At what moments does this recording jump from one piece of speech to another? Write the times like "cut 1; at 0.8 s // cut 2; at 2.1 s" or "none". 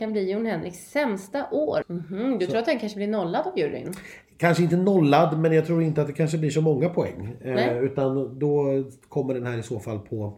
cut 1; at 1.8 s